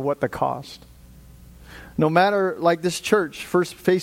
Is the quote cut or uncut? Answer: uncut